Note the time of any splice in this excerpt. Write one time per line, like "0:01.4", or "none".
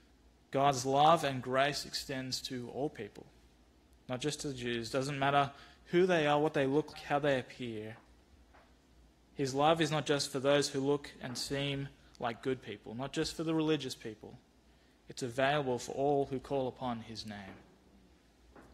0:06.9